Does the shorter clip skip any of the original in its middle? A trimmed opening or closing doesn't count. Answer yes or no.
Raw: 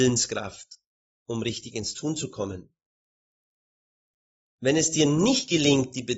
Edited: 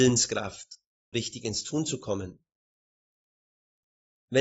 yes